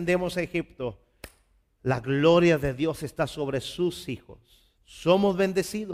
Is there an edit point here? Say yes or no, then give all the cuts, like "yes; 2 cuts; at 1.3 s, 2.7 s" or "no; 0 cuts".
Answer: yes; 1 cut; at 4.8 s